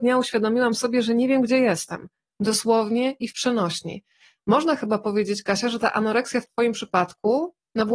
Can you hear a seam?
no; 0 cuts

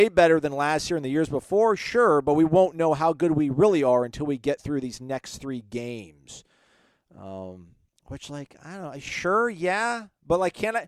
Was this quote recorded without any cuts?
yes; 0 cuts

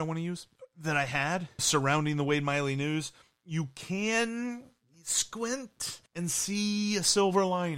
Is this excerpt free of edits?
no; 2 cuts; at 1.6 s, 6.1 s

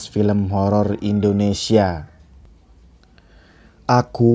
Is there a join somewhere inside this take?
no; 0 cuts

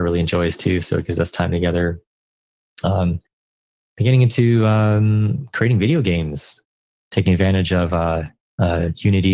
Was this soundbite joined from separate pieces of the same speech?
no; 0 cuts

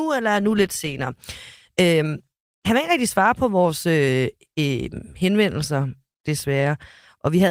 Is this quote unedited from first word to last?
yes; 0 cuts

